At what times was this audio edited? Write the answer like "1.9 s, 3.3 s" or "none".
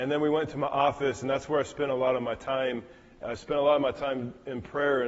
none